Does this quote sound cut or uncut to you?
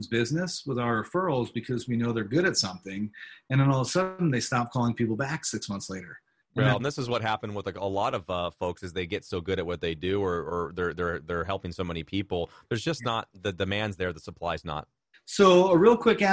cut